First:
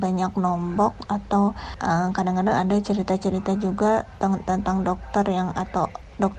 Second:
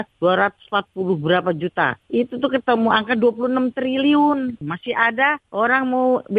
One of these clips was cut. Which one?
second; 1 cut; at 4.6 s

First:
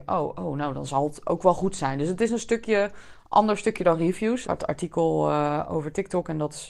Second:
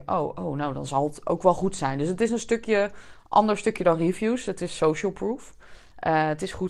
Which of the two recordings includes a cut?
first; 1 cut; at 4.4 s

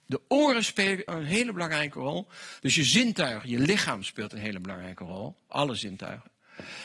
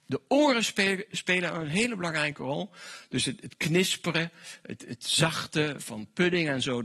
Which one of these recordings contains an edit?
first; 2 cuts; at 1.1 s, 2.6 s

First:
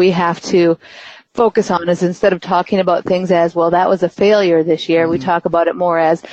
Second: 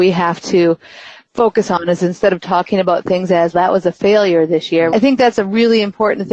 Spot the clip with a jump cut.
second; 2 cuts; at 3.5 s, 4.9 s

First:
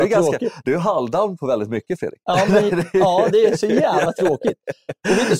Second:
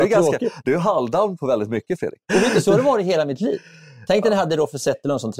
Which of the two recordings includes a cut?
second; 1 cut; at 2.2 s

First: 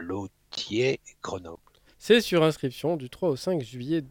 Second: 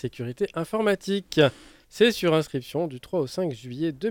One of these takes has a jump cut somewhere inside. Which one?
first; 1 cut; at 1.9 s

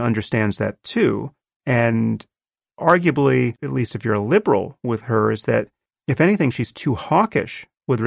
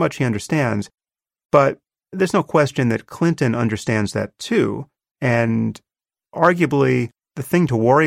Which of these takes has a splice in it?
first; 1 cut; at 3.6 s

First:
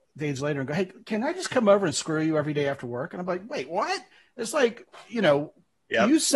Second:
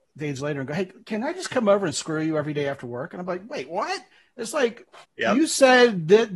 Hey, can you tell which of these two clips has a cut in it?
second; 1 cut; at 5.0 s

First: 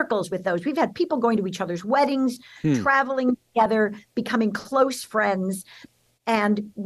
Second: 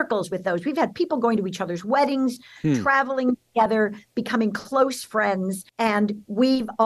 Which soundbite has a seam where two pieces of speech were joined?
second; 1 cut; at 5.7 s

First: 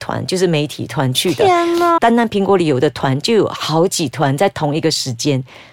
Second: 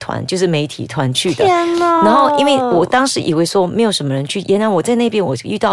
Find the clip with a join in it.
first; 1 cut; at 2.0 s

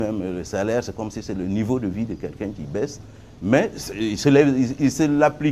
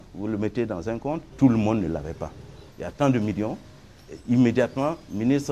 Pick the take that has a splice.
second; 2 cuts; at 1.3 s, 2.7 s

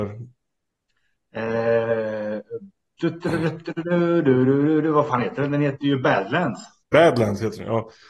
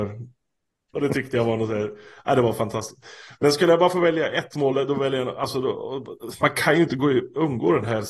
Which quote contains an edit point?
second; 1 cut; at 0.9 s

